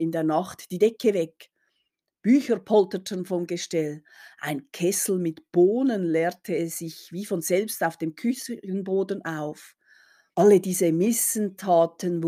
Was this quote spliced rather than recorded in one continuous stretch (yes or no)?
yes